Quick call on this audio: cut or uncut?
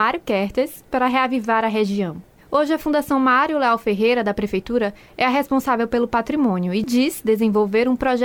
cut